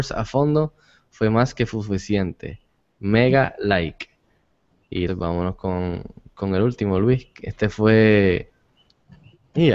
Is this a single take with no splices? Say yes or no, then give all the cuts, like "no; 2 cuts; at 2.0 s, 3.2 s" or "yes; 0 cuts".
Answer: no; 1 cut; at 5.1 s